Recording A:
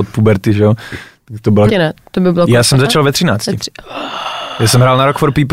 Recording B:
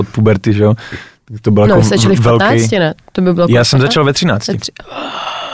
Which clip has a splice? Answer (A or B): A